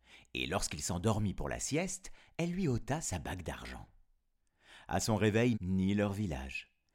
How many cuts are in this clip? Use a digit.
1